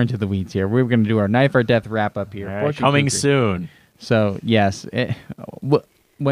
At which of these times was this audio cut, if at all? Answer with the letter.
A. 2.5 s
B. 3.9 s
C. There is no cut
C